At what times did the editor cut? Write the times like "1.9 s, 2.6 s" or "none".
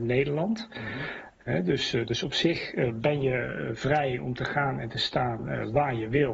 1.4 s